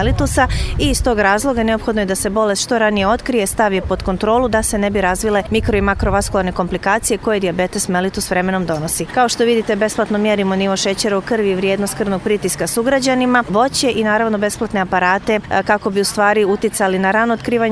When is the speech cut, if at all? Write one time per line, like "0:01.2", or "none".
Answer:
0:09.1
0:13.5